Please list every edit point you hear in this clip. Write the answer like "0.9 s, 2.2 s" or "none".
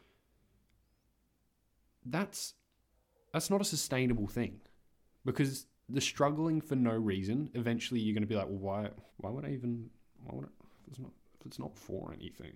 9.1 s

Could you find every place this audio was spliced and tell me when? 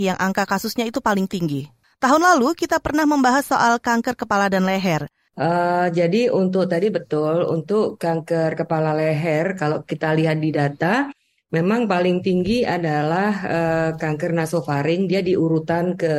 1.8 s, 5.3 s

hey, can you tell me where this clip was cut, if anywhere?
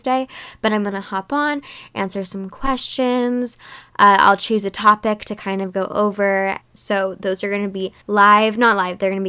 6.6 s, 8.0 s

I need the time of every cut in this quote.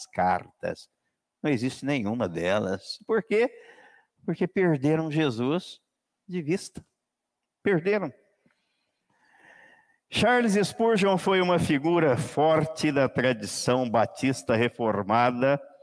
none

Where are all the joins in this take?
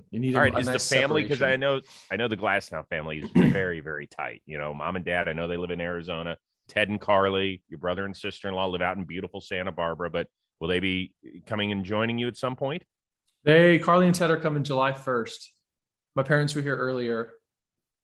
none

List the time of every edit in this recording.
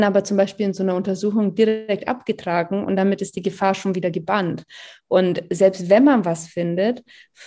none

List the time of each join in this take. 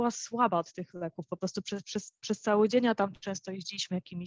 2.2 s

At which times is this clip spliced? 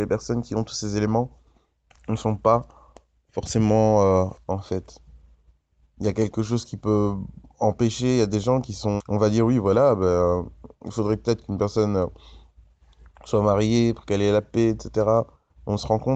4.3 s, 9.0 s

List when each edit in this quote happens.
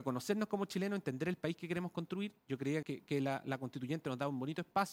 2.8 s

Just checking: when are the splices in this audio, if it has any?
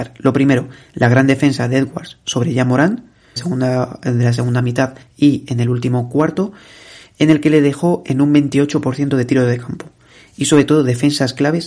3.4 s

